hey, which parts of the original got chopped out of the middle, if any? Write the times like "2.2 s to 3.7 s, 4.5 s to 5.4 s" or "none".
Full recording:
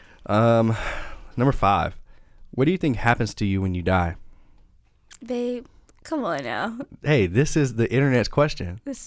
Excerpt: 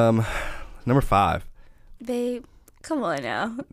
2.5 s to 5.2 s